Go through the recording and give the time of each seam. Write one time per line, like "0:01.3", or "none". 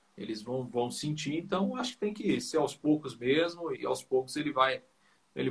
0:03.7

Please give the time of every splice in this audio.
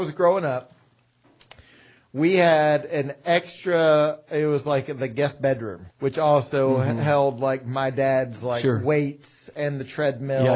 0:05.9

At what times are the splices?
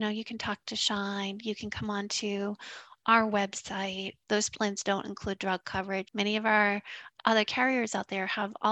0:04.2
0:06.1

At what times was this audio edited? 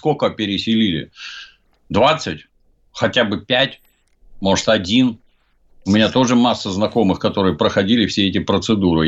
none

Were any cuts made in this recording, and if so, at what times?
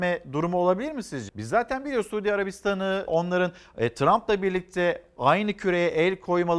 0:01.3
0:03.1

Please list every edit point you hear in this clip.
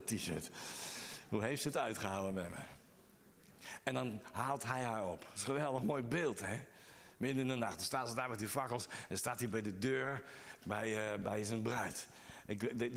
0:03.8

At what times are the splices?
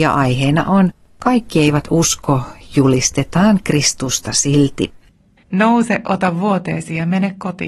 0:05.4

